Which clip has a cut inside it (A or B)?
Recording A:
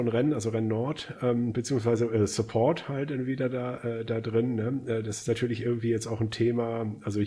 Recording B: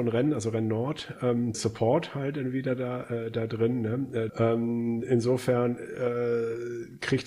B